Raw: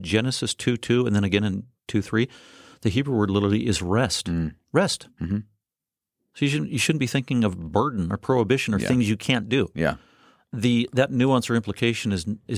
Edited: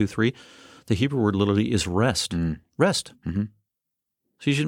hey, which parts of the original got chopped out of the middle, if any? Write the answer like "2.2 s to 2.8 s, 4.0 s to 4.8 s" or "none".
none